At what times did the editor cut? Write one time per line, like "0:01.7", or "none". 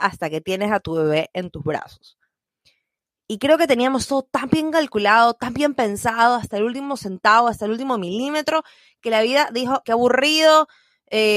0:09.8